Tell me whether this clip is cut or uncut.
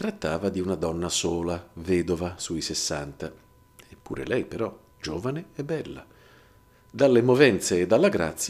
uncut